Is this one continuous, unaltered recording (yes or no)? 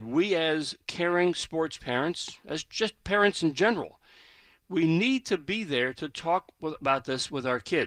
yes